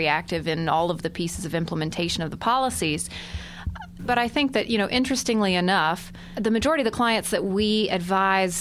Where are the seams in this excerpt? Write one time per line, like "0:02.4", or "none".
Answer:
0:04.0